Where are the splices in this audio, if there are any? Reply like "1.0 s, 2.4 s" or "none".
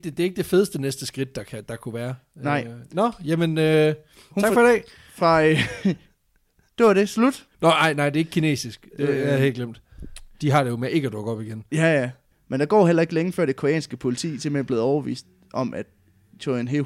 12.3 s

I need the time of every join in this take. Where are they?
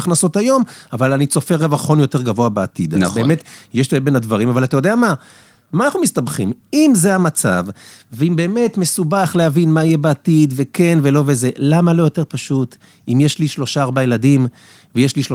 none

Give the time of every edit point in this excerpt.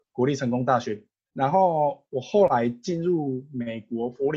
1.3 s

